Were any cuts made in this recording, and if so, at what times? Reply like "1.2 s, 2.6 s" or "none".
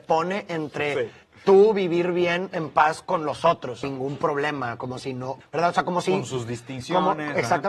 3.8 s, 5.4 s